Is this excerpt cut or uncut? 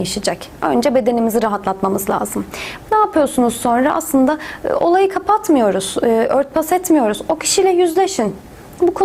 cut